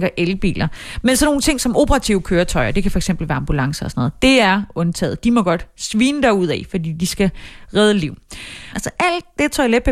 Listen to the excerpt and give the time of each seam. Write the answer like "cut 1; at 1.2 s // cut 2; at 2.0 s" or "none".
cut 1; at 8.7 s